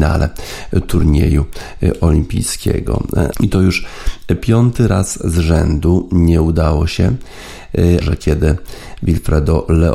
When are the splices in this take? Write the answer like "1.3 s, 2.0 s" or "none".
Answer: 3.3 s, 8.0 s